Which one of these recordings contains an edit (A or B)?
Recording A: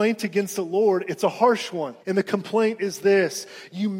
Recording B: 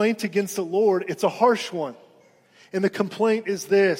A